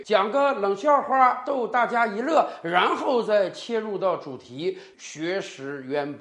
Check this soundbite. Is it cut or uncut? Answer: cut